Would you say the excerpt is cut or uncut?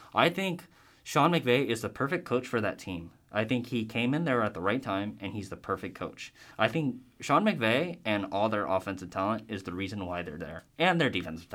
uncut